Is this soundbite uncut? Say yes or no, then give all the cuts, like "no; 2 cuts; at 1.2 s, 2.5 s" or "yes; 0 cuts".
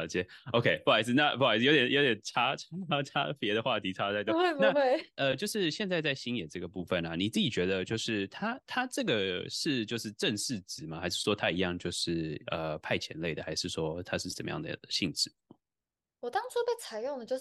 yes; 0 cuts